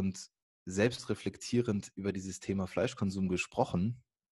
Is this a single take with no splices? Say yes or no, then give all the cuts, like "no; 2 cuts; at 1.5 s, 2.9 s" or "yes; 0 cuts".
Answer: yes; 0 cuts